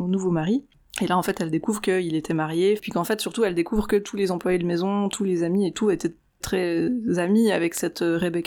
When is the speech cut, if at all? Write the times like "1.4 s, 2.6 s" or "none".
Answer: 2.8 s, 6.4 s